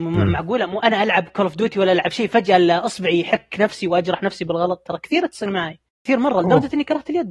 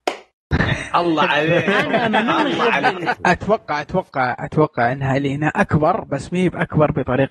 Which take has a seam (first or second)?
second